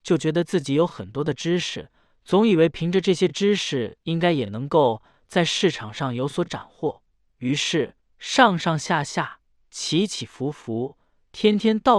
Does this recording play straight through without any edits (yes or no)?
yes